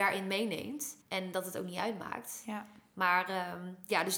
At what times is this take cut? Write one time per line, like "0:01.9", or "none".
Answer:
0:01.0